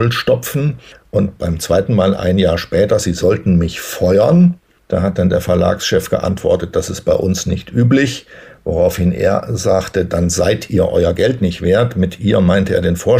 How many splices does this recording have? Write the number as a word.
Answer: zero